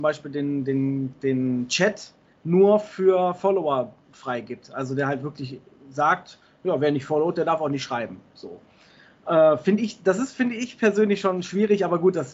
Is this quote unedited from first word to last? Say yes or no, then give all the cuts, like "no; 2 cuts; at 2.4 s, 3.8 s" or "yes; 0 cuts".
yes; 0 cuts